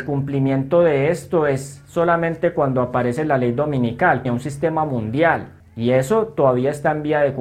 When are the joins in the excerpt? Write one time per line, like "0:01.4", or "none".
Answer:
0:04.3
0:05.6

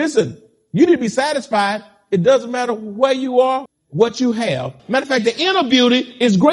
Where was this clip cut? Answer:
0:03.7
0:04.8

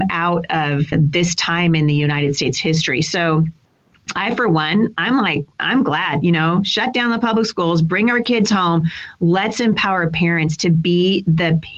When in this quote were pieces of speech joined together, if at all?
0:00.9

